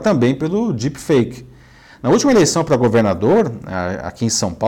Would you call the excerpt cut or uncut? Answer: uncut